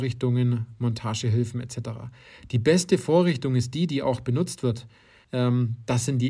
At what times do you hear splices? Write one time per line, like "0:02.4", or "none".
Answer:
0:05.2